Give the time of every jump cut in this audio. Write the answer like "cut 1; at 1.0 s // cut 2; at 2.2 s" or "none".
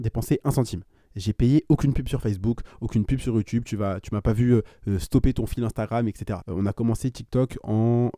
cut 1; at 6.4 s